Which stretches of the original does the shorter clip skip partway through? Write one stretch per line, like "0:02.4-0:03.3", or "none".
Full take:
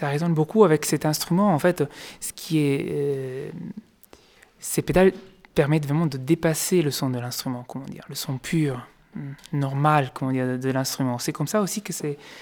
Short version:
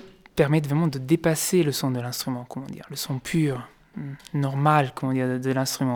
none